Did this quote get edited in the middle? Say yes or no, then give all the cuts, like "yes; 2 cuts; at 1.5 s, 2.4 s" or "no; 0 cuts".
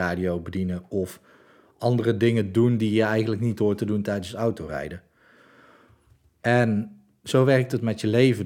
no; 0 cuts